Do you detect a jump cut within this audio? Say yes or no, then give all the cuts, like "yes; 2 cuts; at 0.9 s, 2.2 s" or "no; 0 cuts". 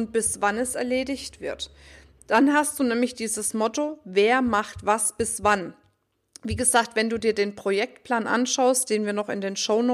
no; 0 cuts